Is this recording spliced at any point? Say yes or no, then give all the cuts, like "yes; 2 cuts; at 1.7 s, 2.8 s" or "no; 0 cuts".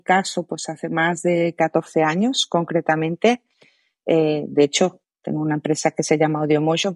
no; 0 cuts